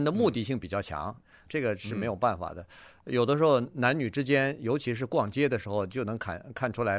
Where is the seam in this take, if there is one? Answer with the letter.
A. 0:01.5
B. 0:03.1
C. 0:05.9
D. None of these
A